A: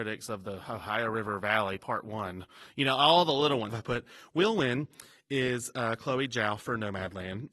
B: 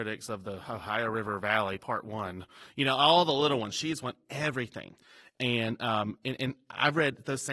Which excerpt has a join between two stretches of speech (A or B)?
A